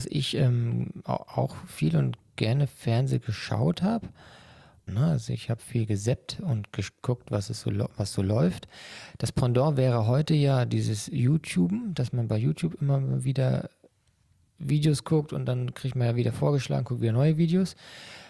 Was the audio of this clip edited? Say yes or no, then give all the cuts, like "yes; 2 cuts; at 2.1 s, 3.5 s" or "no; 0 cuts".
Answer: yes; 1 cut; at 4.9 s